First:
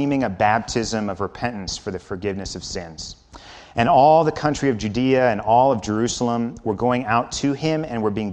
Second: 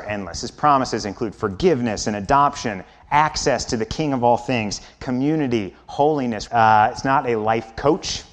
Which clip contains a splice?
second; 1 cut; at 6.5 s

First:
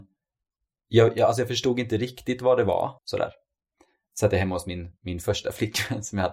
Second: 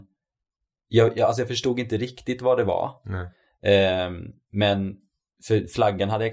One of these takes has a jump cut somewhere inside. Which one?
first; 1 cut; at 3.0 s

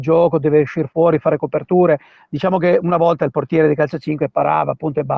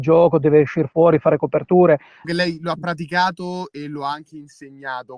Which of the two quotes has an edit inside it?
second; 1 cut; at 2.2 s

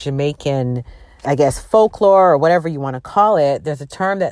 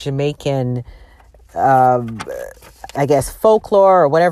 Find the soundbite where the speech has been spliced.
first; 1 cut; at 1.2 s

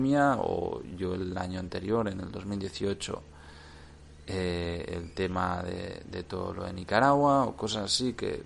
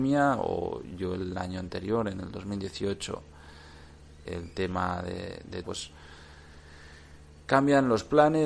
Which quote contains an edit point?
second; 2 cuts; at 4.3 s, 5.6 s

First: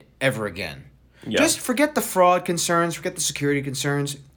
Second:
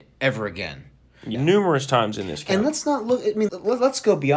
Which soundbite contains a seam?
second; 2 cuts; at 1.3 s, 3.5 s

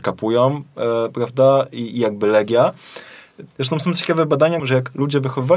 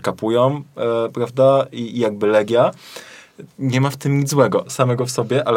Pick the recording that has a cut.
first; 2 cuts; at 3.6 s, 4.6 s

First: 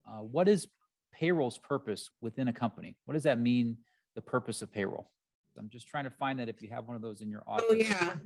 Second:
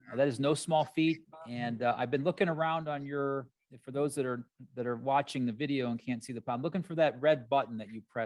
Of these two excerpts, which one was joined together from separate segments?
first; 2 cuts; at 2.1 s, 5.6 s

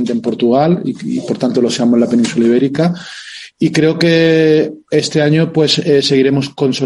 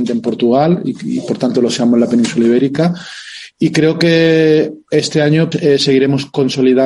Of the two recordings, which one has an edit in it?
second; 1 cut; at 5.5 s

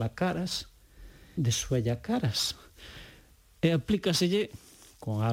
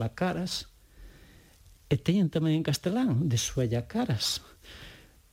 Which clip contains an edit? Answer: first; 1 cut; at 1.4 s

